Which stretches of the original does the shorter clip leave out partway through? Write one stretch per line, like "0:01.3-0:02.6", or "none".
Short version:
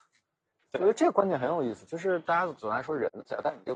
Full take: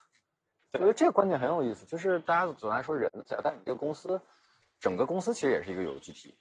none